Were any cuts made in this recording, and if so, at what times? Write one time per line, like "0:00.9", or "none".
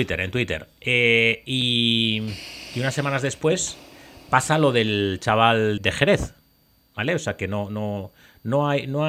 0:05.8